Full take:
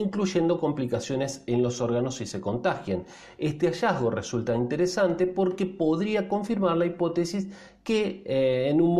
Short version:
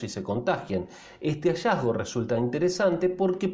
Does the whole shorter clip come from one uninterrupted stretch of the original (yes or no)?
yes